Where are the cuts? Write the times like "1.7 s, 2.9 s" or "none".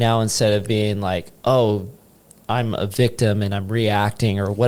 1.4 s